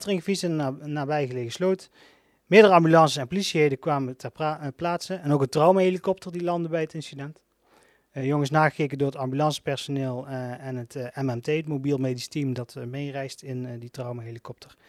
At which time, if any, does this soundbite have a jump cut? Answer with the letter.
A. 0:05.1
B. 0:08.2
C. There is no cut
C